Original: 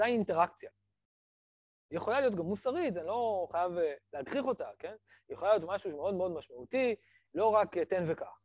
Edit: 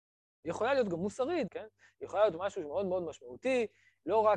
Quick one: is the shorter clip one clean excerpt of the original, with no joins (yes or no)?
no